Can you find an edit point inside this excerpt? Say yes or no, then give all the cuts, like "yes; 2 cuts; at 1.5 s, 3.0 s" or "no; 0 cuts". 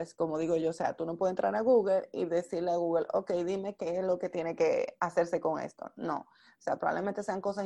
no; 0 cuts